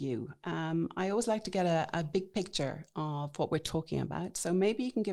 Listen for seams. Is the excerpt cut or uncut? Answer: uncut